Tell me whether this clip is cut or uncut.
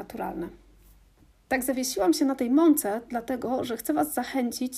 cut